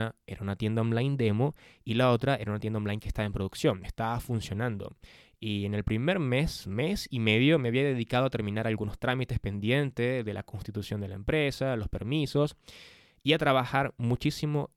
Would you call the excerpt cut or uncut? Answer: uncut